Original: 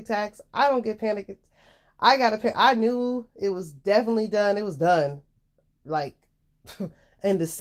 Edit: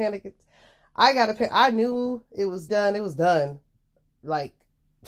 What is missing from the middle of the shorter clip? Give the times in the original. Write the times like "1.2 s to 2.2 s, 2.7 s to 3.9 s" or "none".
3.7 s to 4.3 s